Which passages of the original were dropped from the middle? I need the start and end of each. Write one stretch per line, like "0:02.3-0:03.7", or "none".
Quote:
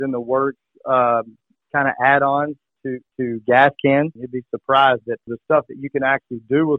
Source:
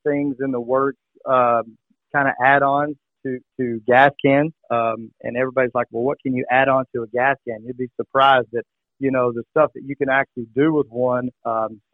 0:04.6-0:07.6
0:08.7-0:09.3